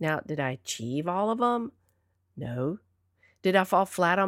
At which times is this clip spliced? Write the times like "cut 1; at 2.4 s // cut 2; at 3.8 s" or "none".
none